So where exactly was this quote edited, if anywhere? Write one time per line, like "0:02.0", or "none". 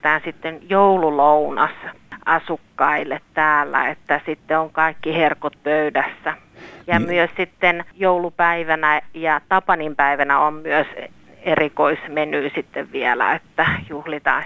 none